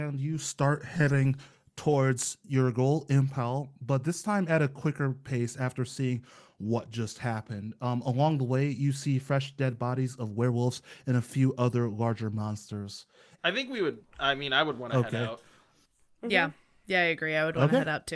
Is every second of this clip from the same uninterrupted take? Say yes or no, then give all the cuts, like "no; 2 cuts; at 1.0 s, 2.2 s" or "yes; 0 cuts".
no; 1 cut; at 13.4 s